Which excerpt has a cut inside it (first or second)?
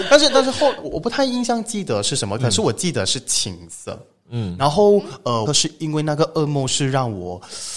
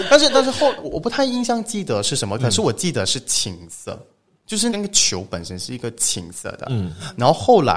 first